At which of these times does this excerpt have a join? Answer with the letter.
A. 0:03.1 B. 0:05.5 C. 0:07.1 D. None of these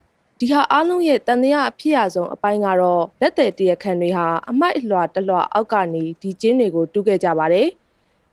A